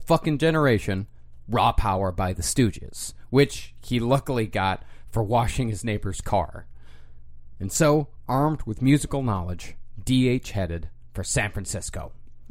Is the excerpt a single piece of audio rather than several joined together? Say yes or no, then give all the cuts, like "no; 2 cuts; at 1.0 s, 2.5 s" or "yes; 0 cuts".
yes; 0 cuts